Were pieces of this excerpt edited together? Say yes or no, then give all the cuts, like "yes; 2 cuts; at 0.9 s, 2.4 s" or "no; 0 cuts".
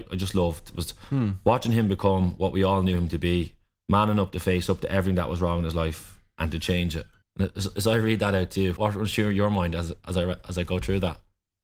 yes; 2 cuts; at 7.2 s, 8.8 s